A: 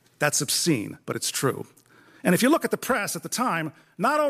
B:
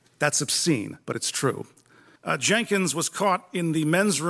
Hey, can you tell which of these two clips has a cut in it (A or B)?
B